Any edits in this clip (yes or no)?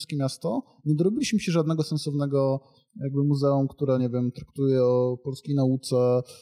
no